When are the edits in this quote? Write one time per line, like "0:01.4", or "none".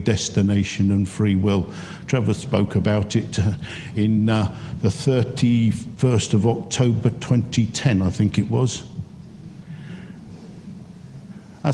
none